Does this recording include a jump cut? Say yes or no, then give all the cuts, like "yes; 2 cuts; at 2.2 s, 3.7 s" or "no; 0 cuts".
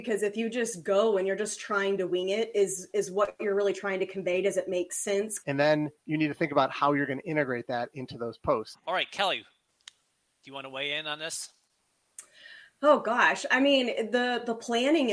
yes; 2 cuts; at 5.4 s, 8.7 s